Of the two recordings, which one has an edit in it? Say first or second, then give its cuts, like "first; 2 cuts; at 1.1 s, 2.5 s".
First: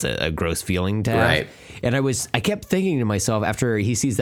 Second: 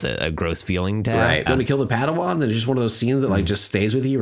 second; 1 cut; at 1.5 s